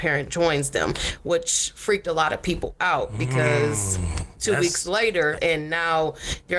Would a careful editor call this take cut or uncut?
cut